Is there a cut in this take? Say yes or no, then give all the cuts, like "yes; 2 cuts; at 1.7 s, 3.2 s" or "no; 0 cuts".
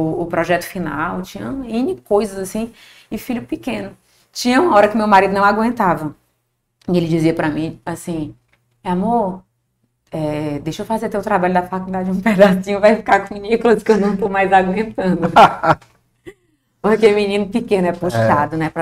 no; 0 cuts